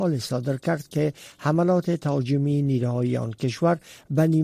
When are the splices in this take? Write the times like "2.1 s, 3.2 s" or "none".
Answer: none